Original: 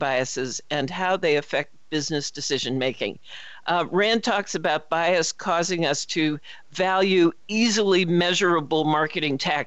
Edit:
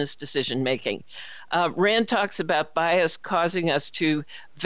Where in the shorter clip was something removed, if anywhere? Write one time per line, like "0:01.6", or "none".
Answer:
none